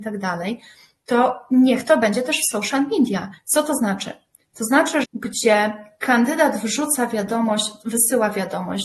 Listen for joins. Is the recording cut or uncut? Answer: cut